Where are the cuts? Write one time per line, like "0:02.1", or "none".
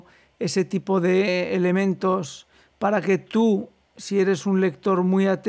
none

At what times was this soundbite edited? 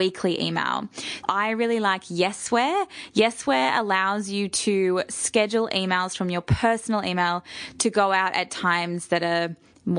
0:01.2

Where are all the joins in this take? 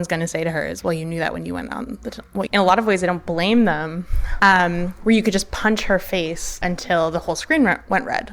0:02.5
0:04.4
0:06.6

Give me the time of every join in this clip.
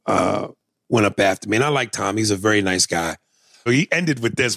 0:03.7

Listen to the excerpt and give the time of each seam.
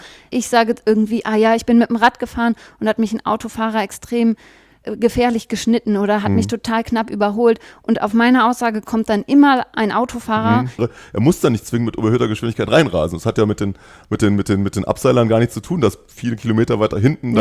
0:10.8

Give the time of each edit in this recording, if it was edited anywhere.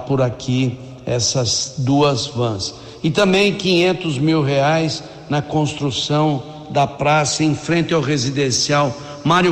none

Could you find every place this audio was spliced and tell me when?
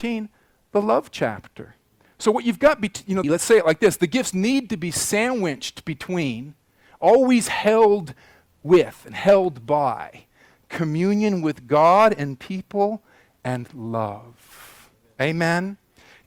0:03.2

